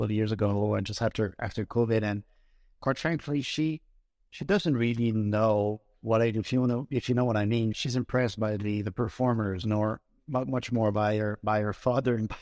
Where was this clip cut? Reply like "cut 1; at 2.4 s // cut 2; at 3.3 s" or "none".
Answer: cut 1; at 7.7 s